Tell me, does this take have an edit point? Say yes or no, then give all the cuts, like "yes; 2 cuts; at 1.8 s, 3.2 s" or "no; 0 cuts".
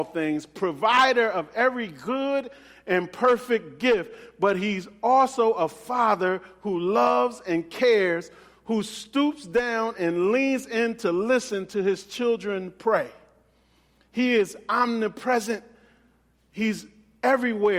no; 0 cuts